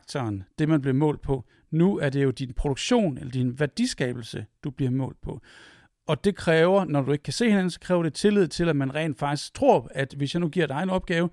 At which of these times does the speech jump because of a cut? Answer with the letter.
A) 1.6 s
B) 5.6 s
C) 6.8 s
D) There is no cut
D